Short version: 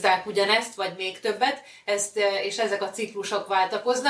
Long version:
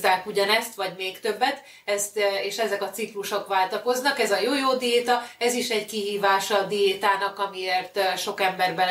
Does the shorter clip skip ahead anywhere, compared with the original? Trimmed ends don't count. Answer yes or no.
no